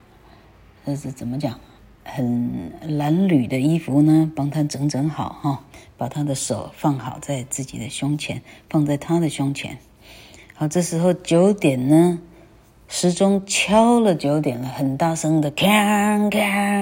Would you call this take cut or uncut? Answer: uncut